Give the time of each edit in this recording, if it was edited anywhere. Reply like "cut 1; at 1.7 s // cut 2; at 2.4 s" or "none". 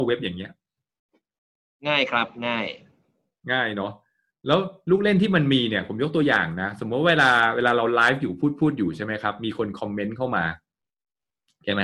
none